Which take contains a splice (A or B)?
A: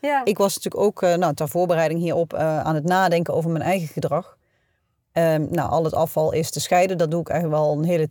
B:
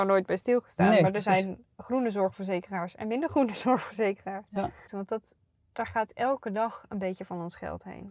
B